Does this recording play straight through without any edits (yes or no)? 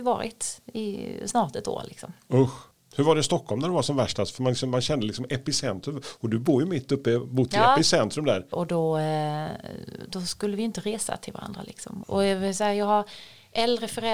no